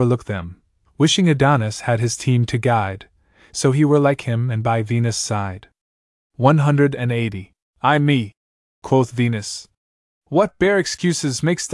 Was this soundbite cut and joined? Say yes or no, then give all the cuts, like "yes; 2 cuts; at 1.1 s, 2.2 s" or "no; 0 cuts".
yes; 2 cuts; at 7.7 s, 10.1 s